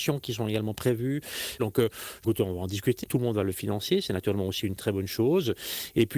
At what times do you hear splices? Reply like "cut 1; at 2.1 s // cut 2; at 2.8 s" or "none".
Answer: cut 1; at 1.6 s // cut 2; at 3.0 s